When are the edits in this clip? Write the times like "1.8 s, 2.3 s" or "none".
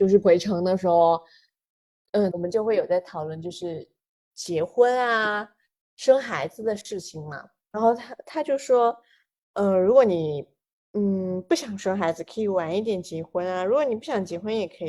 2.3 s

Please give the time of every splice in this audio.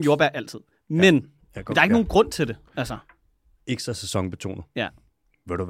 3.6 s

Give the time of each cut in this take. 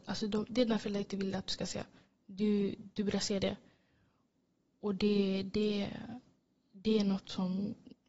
none

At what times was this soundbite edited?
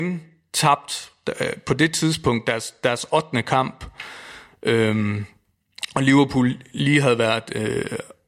none

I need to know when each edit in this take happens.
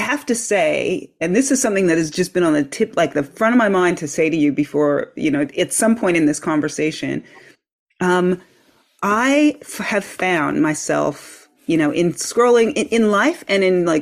none

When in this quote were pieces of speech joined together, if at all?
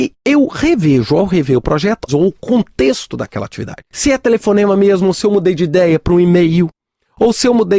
2.1 s, 3.9 s

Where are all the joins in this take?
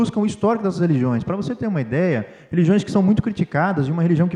none

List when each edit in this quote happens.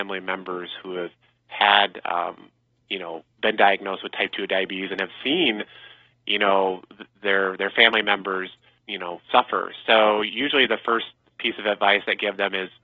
8.8 s

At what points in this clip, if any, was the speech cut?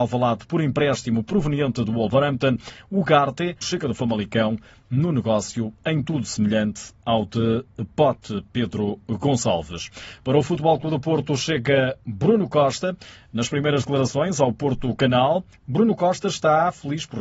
3.6 s

